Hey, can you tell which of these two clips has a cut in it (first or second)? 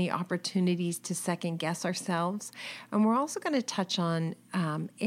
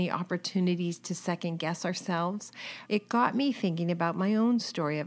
second